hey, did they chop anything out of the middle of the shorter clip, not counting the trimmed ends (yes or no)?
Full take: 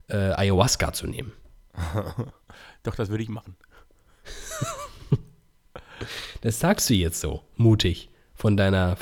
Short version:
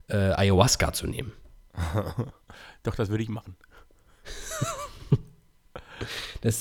no